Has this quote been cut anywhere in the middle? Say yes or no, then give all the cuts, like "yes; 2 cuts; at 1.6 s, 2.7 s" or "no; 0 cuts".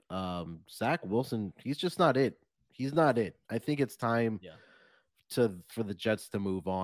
no; 0 cuts